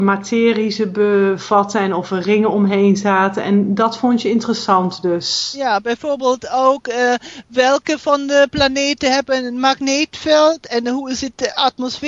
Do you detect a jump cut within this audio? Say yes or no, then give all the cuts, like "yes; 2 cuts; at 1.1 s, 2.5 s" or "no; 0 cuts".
no; 0 cuts